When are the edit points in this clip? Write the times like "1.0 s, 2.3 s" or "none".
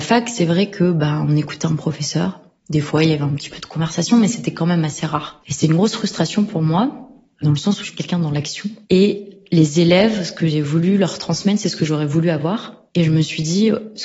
5.4 s, 8.8 s